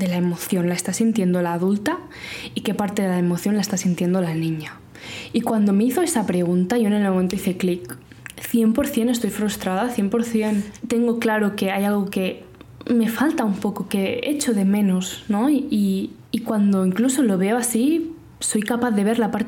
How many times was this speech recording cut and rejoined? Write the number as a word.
zero